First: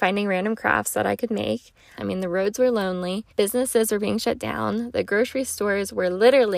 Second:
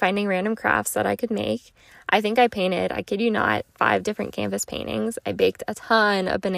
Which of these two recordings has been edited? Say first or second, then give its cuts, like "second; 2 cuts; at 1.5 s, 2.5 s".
first; 2 cuts; at 2.0 s, 3.3 s